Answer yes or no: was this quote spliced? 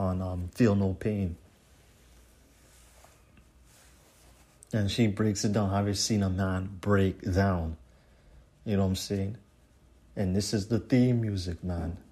no